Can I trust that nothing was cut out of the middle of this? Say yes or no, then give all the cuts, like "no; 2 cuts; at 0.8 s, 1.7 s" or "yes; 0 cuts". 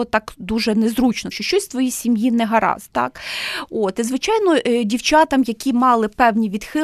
no; 1 cut; at 1.3 s